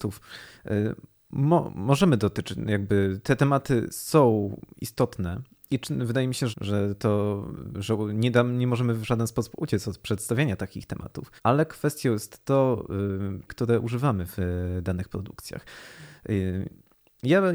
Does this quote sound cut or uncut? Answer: cut